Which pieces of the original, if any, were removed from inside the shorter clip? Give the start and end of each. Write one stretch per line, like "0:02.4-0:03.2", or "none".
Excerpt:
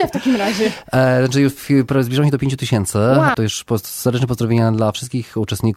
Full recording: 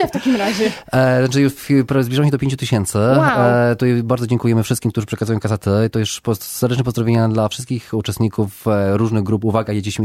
0:03.3-0:05.9